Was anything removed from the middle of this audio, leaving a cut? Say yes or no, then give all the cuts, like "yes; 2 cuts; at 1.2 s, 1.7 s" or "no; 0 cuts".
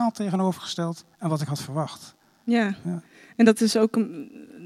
yes; 1 cut; at 1.1 s